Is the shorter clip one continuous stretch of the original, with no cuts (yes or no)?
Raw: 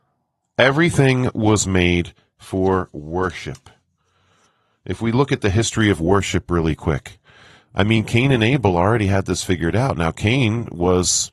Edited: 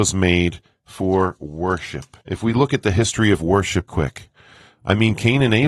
no